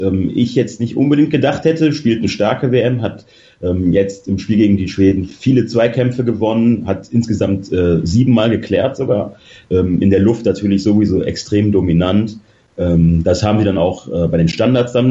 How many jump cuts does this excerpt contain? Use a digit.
0